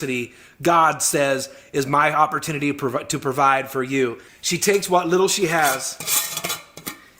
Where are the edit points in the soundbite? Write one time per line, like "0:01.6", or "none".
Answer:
0:04.3